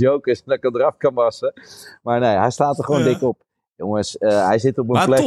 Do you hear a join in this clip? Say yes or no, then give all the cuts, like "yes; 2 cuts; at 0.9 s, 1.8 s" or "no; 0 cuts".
no; 0 cuts